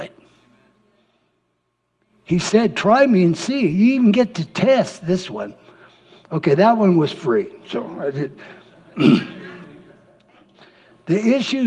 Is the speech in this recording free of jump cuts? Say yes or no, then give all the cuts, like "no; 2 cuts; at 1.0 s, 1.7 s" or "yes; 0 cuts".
yes; 0 cuts